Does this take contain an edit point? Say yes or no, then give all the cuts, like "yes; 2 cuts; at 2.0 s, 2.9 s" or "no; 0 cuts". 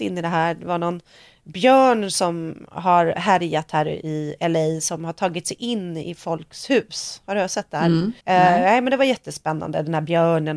yes; 1 cut; at 8.2 s